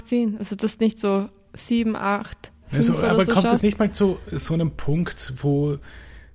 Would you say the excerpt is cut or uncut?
cut